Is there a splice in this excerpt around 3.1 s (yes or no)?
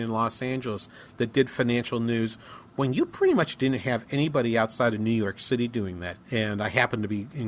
no